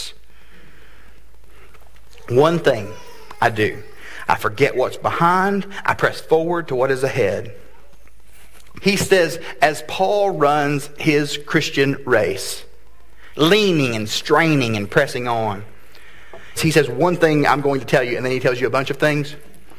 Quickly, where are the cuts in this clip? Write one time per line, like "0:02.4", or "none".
0:08.8
0:13.3
0:16.6

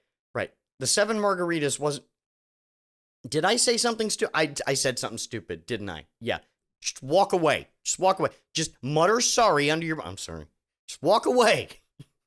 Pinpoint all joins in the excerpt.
none

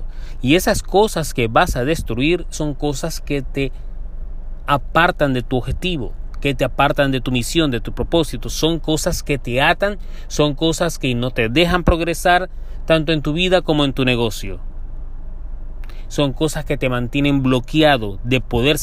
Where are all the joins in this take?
0:02.5

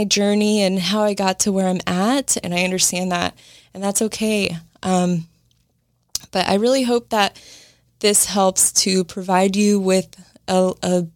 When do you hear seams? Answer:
0:02.4

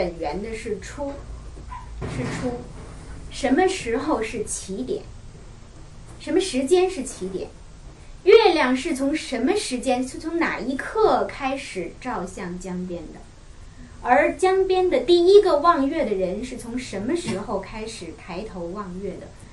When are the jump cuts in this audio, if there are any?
none

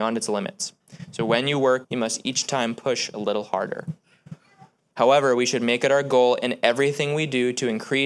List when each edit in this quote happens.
0:01.8
0:04.9

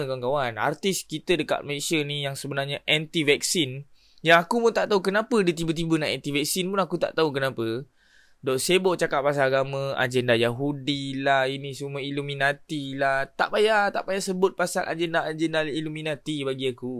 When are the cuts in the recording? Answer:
none

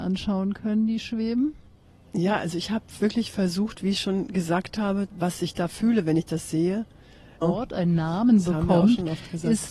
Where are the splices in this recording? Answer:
0:05.1
0:07.4

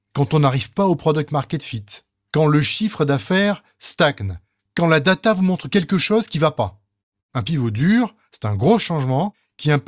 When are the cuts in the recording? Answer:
0:07.2

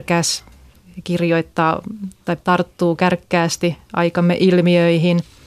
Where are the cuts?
0:02.4

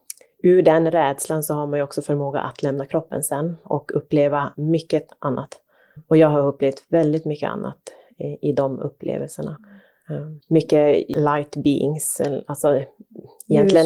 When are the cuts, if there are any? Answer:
none

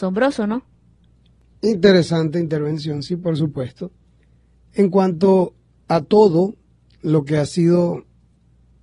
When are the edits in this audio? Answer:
none

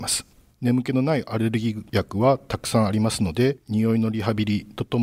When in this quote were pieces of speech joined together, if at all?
none

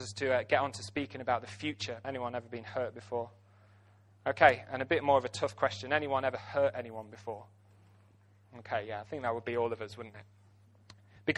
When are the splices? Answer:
0:02.0

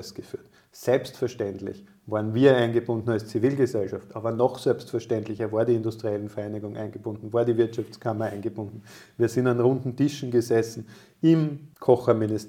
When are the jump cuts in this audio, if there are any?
none

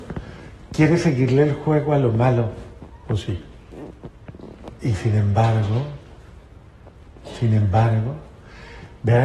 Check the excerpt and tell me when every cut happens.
0:03.0
0:04.8

